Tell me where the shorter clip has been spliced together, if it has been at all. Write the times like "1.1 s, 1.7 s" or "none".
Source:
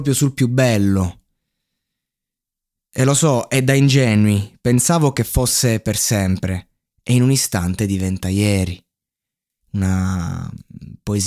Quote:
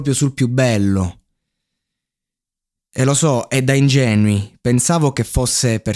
none